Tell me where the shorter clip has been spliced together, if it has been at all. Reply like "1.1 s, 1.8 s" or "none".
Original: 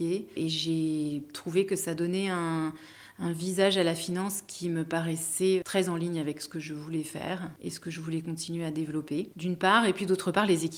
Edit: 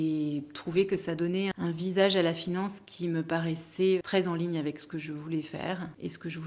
1.5 s